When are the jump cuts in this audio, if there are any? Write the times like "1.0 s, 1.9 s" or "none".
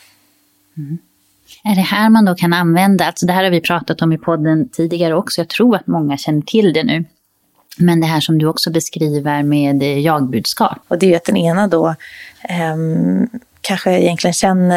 10.8 s

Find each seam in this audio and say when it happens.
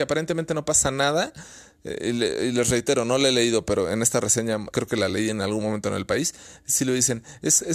4.7 s

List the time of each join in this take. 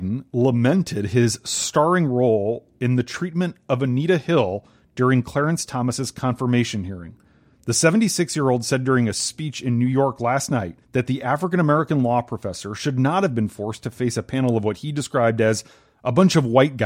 7.5 s, 10.8 s

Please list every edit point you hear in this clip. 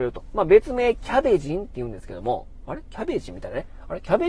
none

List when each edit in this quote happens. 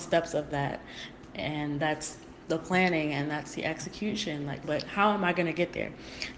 4.6 s

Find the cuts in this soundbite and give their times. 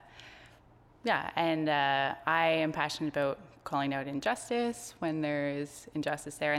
none

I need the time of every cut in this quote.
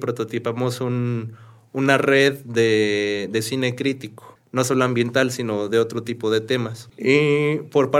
6.9 s

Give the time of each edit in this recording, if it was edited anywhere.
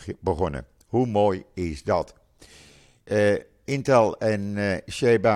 none

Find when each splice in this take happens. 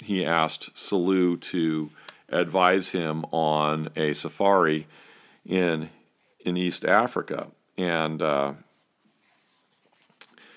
none

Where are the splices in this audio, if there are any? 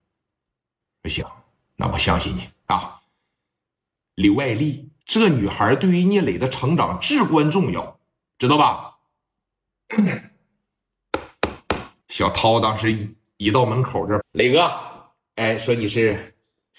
5.0 s, 12.0 s, 14.2 s

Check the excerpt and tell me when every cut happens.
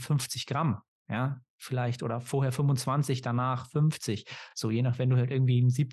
none

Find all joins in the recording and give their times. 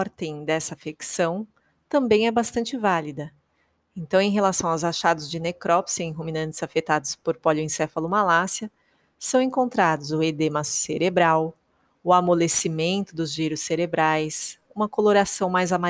none

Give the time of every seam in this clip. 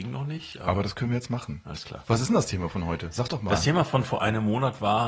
none

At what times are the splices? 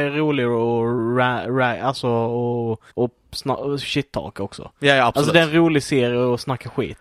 2.9 s

